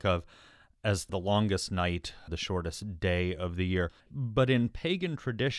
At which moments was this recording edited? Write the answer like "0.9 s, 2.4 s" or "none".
2.3 s, 4.0 s